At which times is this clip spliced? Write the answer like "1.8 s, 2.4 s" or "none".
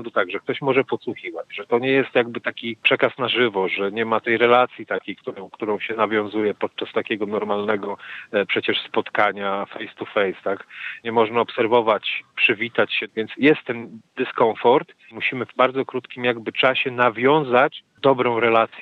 none